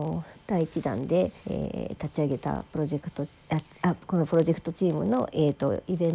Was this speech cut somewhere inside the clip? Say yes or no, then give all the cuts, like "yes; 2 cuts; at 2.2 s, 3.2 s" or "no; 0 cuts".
yes; 1 cut; at 1.4 s